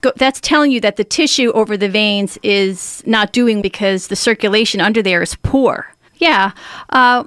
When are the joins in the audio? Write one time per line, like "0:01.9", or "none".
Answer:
0:03.6
0:06.1